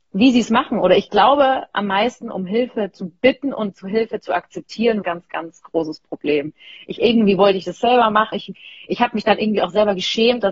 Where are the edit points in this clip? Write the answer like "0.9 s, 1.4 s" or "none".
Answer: 5.0 s, 8.3 s